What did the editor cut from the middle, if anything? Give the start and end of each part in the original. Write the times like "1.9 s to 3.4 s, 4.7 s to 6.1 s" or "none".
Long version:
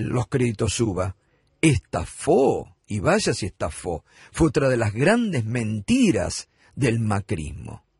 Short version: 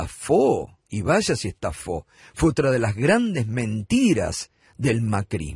none